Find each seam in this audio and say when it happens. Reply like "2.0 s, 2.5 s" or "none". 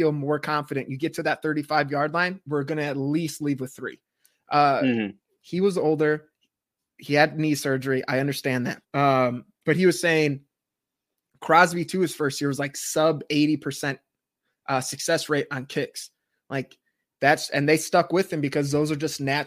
5.4 s, 8.8 s